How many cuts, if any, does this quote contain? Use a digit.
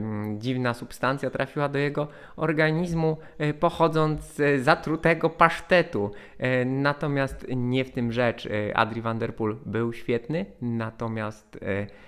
0